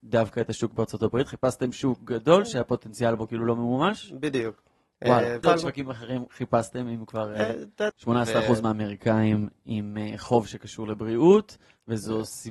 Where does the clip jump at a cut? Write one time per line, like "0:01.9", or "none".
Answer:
0:05.4
0:07.9